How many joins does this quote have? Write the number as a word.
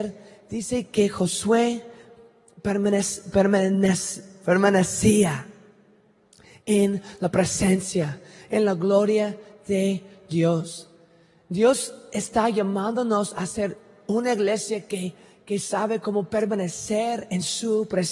zero